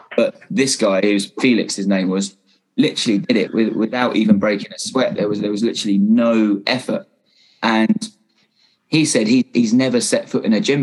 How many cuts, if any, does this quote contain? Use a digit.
1